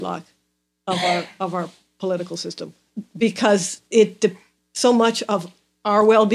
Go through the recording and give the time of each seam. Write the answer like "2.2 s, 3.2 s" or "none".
none